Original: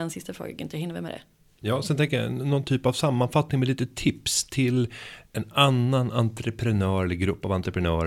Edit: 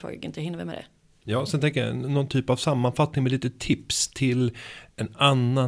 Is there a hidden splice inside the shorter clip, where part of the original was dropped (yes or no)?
no